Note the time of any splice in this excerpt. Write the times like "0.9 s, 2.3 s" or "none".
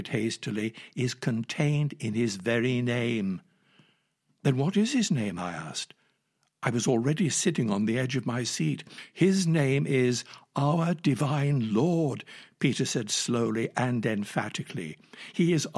none